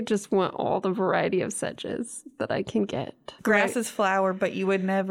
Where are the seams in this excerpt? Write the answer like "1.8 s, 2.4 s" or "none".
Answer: 3.4 s